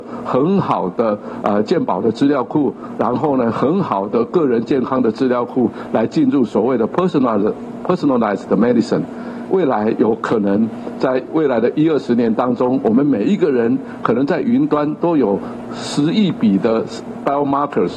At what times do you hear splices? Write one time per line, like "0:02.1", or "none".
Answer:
none